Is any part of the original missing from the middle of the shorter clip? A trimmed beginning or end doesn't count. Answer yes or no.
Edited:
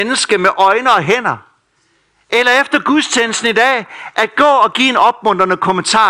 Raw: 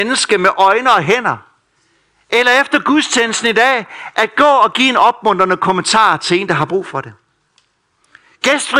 no